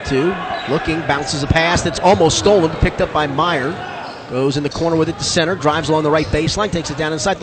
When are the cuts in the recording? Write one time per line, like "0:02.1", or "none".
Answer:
none